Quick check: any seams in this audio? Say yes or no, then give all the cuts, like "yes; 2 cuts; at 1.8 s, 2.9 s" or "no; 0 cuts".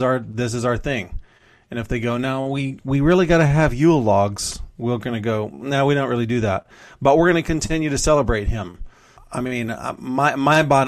yes; 1 cut; at 9.2 s